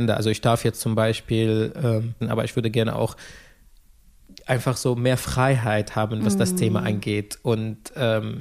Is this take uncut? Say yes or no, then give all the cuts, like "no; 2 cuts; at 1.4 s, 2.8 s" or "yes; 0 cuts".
no; 1 cut; at 2.2 s